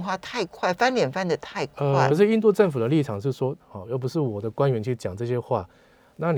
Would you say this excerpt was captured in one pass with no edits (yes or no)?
no